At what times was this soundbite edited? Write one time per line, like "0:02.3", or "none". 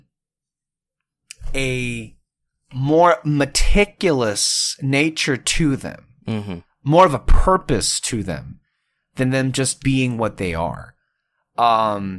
none